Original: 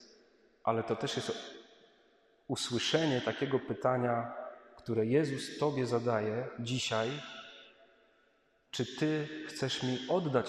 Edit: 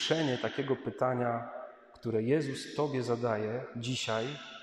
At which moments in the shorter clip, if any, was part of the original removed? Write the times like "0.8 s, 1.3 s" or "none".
none